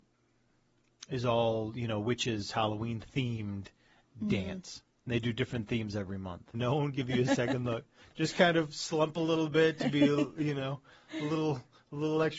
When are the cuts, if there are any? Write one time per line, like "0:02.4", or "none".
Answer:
0:06.5